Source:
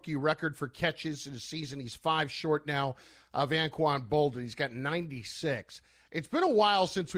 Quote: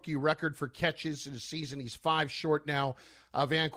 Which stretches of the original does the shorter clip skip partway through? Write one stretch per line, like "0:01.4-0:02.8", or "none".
none